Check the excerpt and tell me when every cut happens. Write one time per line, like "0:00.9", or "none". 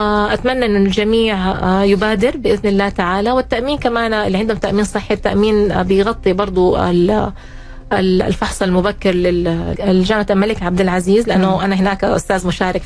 0:09.8